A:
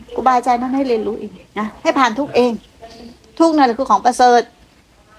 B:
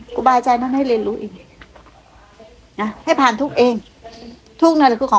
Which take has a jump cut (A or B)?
A